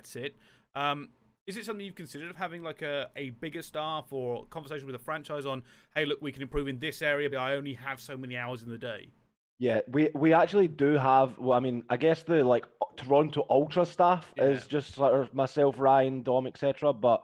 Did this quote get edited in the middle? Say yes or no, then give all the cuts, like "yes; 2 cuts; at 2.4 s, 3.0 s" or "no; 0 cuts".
yes; 1 cut; at 7.3 s